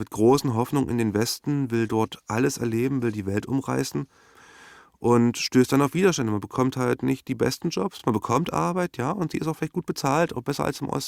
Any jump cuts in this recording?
no; 0 cuts

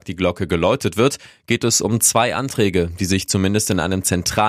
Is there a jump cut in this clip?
no; 0 cuts

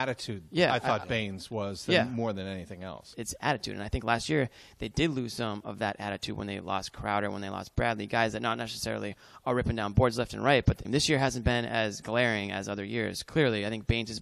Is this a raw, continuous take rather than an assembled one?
no; 2 cuts; at 3.1 s, 10.8 s

